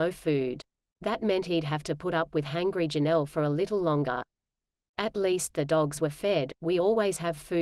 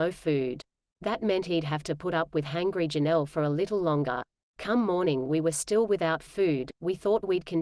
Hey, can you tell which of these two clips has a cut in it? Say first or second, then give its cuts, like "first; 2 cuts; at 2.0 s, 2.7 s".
second; 1 cut; at 4.4 s